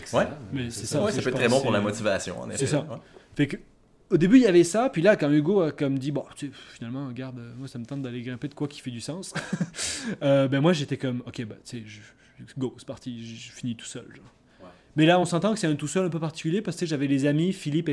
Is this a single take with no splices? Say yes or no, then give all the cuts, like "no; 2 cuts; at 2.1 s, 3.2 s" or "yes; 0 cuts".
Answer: yes; 0 cuts